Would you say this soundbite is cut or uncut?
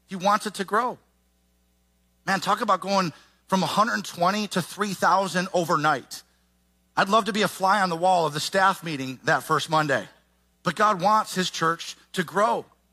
cut